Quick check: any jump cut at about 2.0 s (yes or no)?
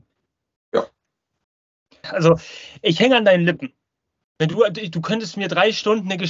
yes